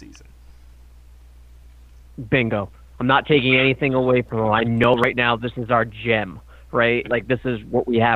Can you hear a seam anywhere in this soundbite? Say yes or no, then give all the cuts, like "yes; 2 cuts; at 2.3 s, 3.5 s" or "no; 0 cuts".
yes; 2 cuts; at 2.9 s, 7.0 s